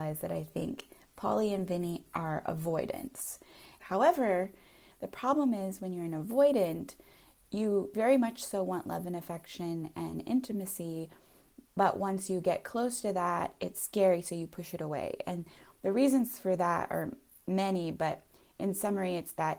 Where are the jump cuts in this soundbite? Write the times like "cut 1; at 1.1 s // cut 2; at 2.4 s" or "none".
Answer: cut 1; at 3.8 s

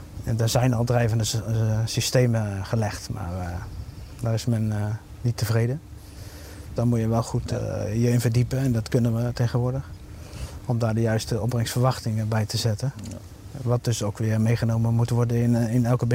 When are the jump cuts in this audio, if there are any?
cut 1; at 6.8 s

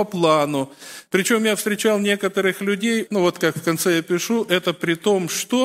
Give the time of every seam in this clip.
cut 1; at 1.1 s // cut 2; at 3.1 s

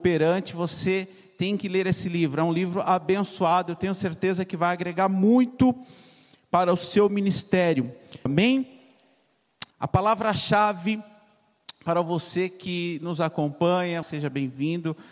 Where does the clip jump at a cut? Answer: cut 1; at 8.3 s // cut 2; at 9.7 s // cut 3; at 14.0 s

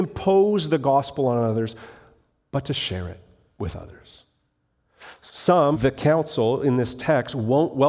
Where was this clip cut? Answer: cut 1; at 5.7 s

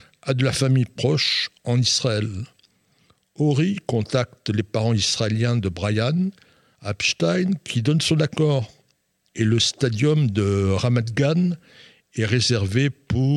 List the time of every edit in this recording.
cut 1; at 9.3 s

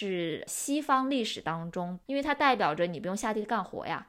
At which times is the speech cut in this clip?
cut 1; at 2.1 s

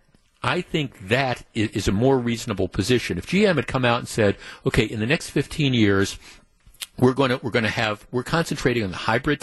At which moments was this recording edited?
none

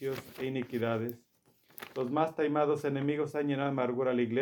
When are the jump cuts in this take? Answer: none

